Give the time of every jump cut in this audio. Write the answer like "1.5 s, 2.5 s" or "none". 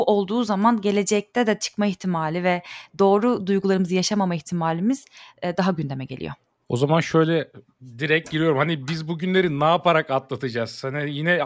none